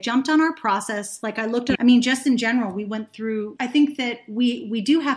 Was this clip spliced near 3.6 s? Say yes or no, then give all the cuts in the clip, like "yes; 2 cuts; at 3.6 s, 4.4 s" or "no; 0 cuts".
yes; 2 cuts; at 1.8 s, 3.6 s